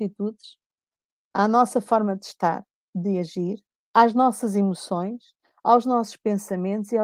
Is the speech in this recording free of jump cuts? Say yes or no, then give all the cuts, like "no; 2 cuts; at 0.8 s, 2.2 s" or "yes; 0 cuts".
yes; 0 cuts